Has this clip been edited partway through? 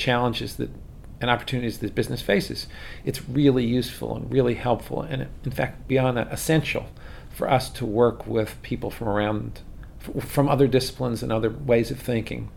no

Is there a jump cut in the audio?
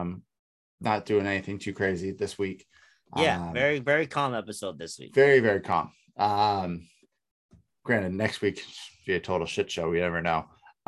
yes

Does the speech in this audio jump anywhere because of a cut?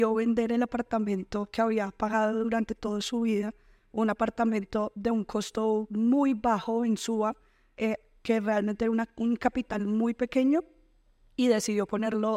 no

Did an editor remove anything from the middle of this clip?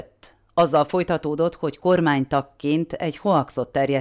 no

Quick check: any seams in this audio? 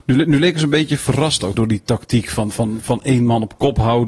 yes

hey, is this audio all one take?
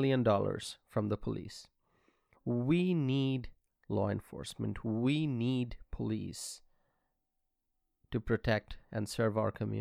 no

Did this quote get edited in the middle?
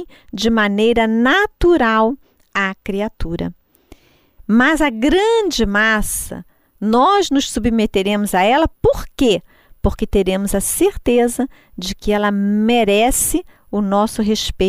yes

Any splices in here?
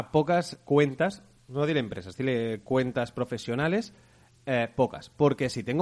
no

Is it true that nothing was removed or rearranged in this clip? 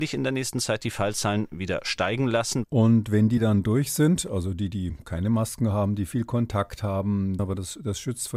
no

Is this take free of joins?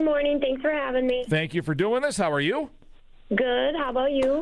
yes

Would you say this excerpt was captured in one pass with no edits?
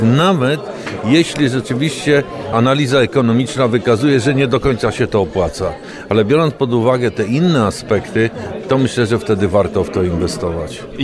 yes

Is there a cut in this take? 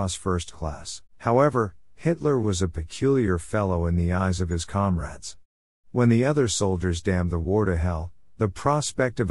yes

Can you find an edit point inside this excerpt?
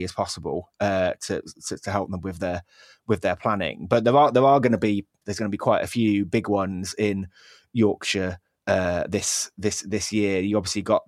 yes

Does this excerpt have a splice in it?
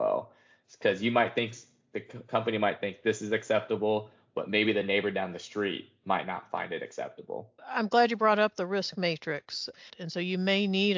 yes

